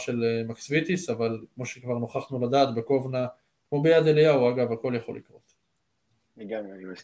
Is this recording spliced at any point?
no; 0 cuts

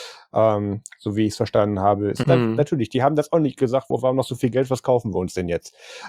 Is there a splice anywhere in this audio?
yes; 2 cuts; at 2.2 s, 3.9 s

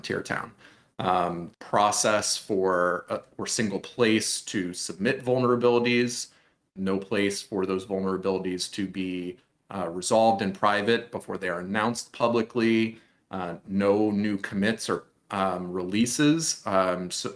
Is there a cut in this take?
yes; 1 cut; at 1.5 s

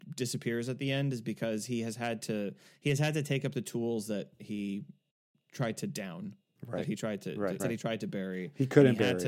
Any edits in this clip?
yes; 1 cut; at 7.6 s

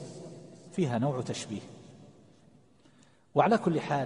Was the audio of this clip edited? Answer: no; 0 cuts

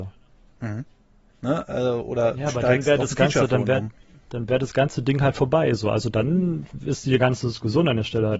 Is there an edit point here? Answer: yes; 1 cut; at 1.3 s

